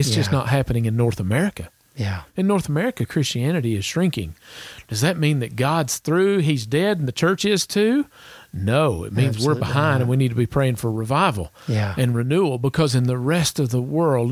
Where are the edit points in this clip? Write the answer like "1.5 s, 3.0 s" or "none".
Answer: none